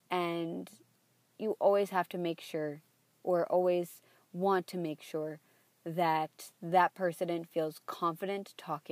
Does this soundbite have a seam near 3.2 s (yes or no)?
no